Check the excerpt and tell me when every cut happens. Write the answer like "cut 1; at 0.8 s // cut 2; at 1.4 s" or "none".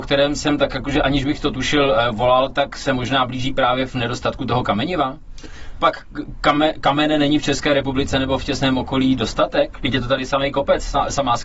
cut 1; at 5.8 s